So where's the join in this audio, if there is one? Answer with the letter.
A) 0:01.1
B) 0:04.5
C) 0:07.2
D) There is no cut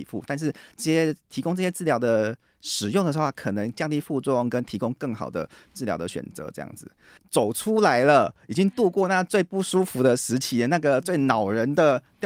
C